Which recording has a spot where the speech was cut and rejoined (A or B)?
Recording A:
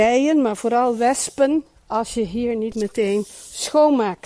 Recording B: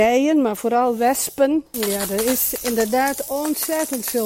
B